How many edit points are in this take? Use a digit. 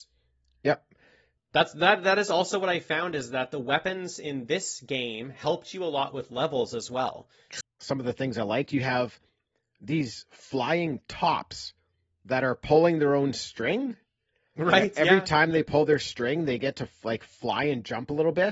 2